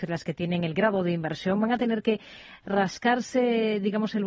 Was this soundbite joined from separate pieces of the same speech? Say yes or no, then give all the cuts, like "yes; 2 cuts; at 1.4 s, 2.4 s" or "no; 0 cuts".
no; 0 cuts